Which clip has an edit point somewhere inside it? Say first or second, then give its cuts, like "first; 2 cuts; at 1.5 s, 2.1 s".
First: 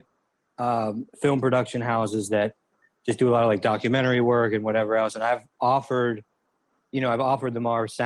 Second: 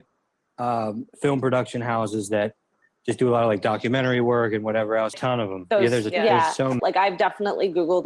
second; 2 cuts; at 5.1 s, 6.8 s